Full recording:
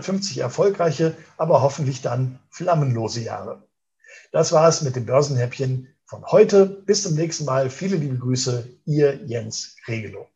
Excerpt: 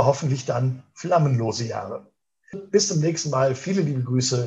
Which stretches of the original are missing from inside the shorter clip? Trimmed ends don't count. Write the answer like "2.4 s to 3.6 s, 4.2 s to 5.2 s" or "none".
4.1 s to 6.7 s